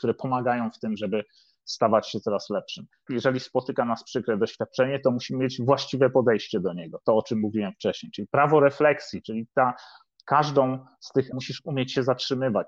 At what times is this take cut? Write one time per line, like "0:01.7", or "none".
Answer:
0:03.1
0:11.3